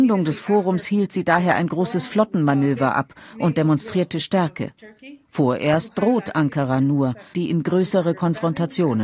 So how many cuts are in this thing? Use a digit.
1